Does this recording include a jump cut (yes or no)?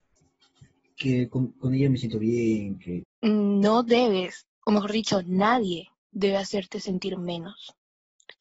yes